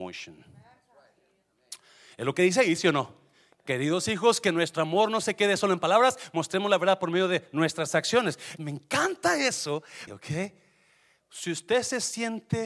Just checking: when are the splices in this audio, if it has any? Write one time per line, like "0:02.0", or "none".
0:08.6
0:10.1